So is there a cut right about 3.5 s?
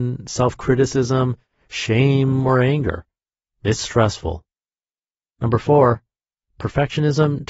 yes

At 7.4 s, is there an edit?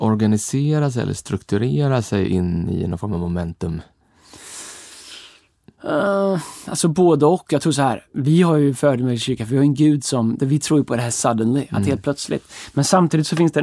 no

